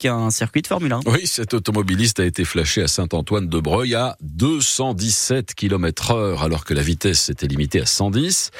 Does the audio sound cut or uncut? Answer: uncut